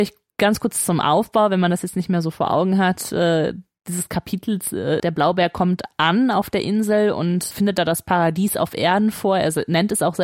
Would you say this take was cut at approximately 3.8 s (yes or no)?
no